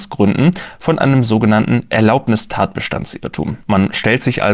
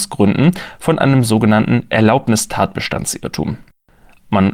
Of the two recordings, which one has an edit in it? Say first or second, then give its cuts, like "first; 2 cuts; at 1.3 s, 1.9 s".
first; 1 cut; at 3.6 s